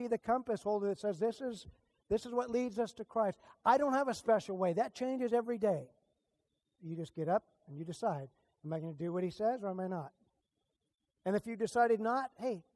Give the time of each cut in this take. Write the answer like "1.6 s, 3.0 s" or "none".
6.8 s